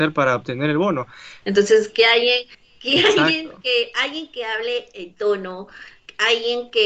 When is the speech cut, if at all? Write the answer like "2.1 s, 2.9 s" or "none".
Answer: 1.4 s